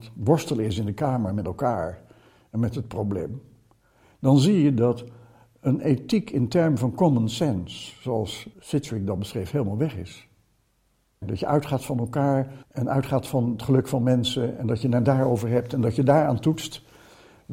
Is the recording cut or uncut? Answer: cut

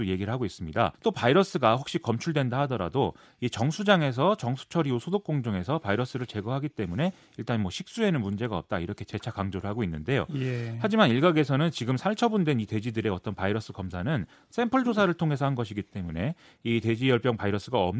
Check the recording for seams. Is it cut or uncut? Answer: cut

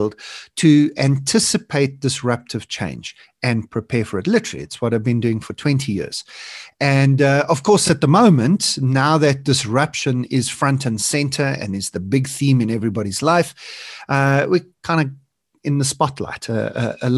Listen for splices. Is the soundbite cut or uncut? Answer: uncut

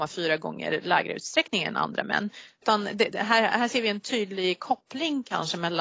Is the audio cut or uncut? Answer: uncut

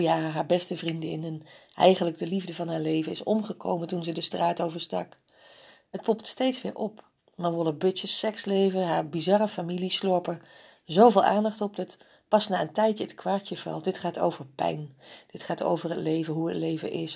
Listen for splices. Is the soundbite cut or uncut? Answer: uncut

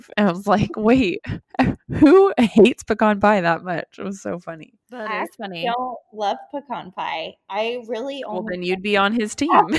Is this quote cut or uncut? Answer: uncut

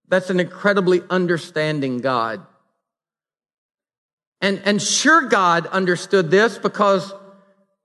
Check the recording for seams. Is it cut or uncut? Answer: uncut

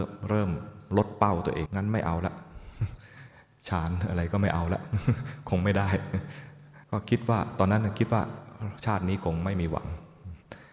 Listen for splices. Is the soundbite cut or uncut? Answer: cut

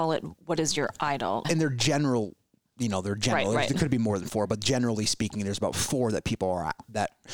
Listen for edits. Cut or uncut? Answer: cut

